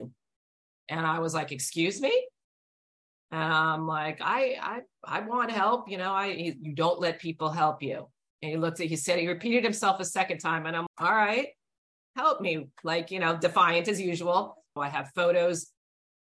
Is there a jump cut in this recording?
yes; 2 cuts; at 10.9 s, 14.8 s

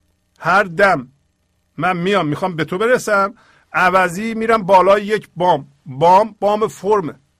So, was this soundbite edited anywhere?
no; 0 cuts

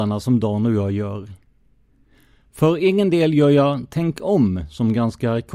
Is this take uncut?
yes; 0 cuts

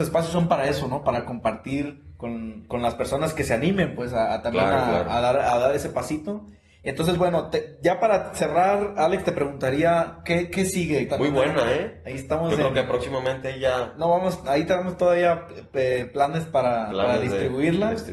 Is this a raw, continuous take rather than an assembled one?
no; 1 cut; at 11.1 s

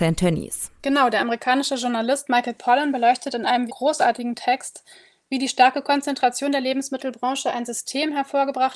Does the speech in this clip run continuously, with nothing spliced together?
no; 1 cut; at 3.7 s

